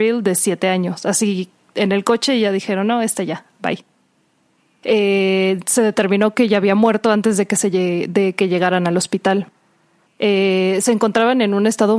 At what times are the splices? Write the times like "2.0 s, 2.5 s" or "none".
10.1 s